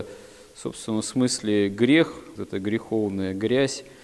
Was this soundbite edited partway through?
yes; 1 cut; at 2.4 s

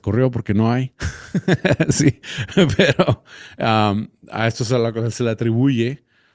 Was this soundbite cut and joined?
no; 0 cuts

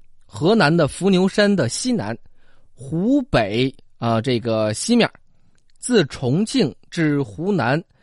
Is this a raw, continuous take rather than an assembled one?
yes; 0 cuts

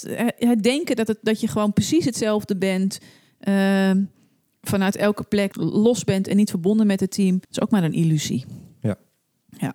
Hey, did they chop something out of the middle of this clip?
yes; 2 cuts; at 5.5 s, 7.4 s

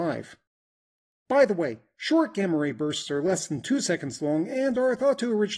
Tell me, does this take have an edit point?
yes; 1 cut; at 1.1 s

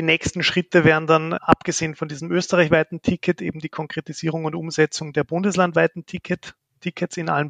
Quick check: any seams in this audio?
yes; 1 cut; at 1.4 s

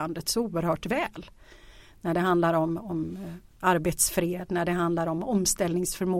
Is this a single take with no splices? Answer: yes; 0 cuts

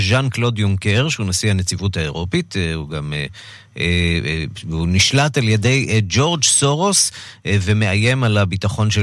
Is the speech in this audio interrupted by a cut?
no; 0 cuts

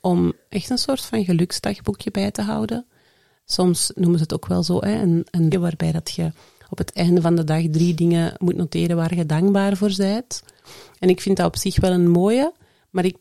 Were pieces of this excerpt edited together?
yes; 1 cut; at 5.5 s

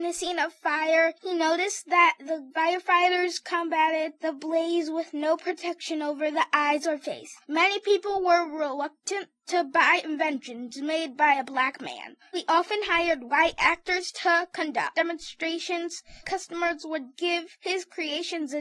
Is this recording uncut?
no; 3 cuts; at 7.4 s, 12.3 s, 16.2 s

